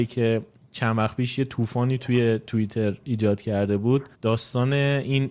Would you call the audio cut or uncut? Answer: cut